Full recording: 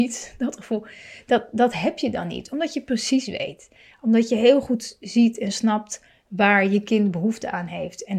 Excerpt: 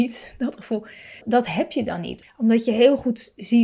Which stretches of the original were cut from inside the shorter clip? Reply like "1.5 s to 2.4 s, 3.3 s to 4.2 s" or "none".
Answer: 1.2 s to 1.5 s, 2.5 s to 3.9 s